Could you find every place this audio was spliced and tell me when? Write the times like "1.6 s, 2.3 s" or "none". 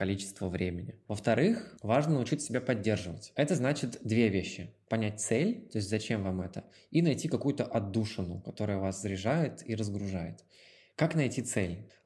none

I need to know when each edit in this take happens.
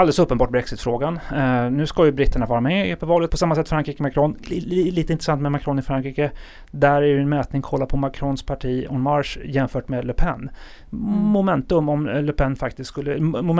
3.3 s

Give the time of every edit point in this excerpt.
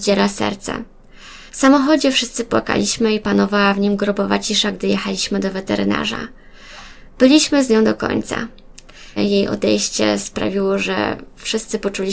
1.5 s, 9.2 s

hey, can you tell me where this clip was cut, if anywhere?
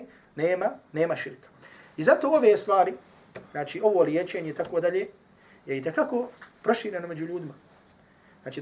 none

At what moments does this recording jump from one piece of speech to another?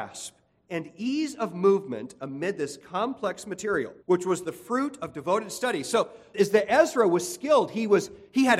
4.0 s, 6.3 s

